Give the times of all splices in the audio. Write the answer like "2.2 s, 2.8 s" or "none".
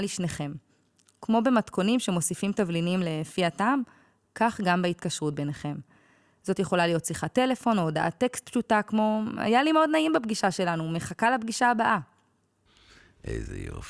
none

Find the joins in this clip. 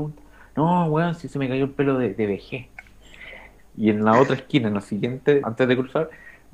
3.6 s, 5.4 s

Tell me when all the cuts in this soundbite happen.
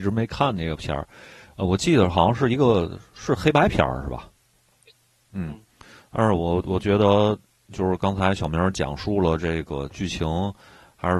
5.3 s

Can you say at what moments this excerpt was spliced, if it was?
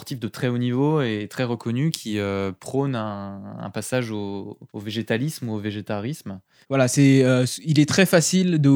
4.7 s, 6.6 s

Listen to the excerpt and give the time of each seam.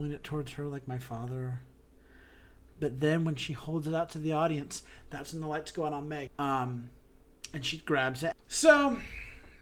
6.3 s, 8.3 s

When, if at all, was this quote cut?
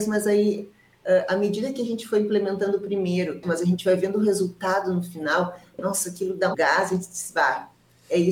3.4 s, 6.5 s

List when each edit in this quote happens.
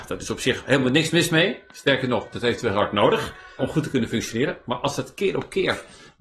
3.6 s

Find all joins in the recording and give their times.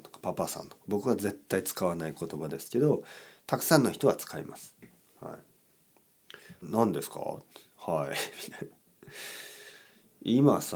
6.6 s

